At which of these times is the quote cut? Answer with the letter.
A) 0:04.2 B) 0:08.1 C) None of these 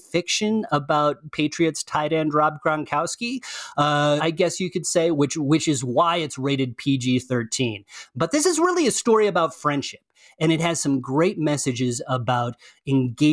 A